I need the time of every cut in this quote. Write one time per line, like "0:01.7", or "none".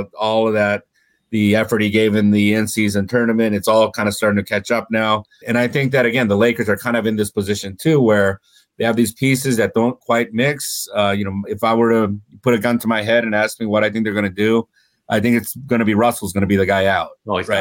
0:05.4

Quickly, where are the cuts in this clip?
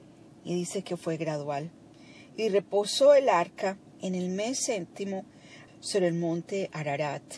0:05.7

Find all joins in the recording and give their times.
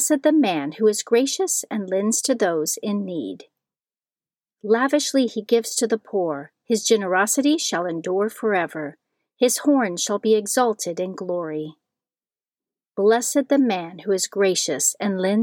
none

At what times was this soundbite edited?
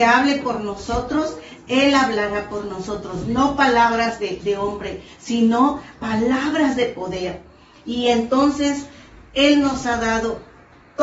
none

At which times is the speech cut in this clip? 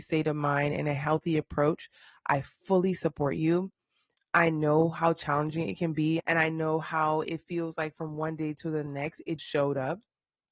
0:06.2
0:09.4

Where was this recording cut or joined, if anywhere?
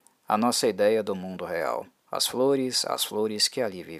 0:02.0

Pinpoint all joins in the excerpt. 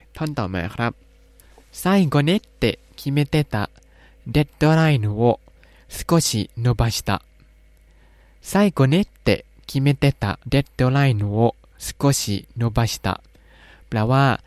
0:10.4

